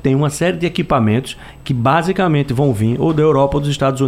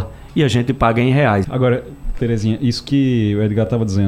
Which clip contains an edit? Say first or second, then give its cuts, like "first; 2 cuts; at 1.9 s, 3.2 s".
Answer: second; 1 cut; at 1.4 s